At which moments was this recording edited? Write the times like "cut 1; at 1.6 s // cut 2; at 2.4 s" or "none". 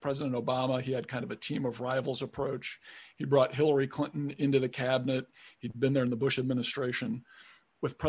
cut 1; at 5.5 s